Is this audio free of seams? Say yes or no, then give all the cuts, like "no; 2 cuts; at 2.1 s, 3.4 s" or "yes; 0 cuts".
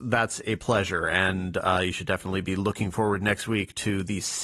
yes; 0 cuts